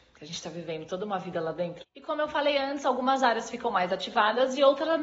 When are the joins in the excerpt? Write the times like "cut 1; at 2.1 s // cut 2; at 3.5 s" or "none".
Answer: cut 1; at 1.8 s